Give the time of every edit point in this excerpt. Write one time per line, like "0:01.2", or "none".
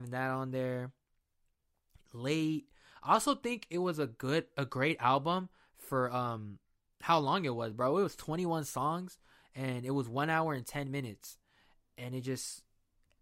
none